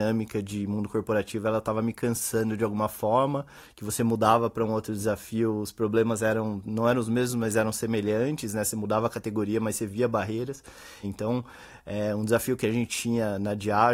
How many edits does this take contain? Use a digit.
1